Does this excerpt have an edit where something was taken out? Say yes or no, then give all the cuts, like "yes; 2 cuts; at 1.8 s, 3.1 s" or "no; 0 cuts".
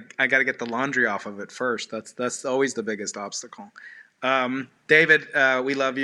no; 0 cuts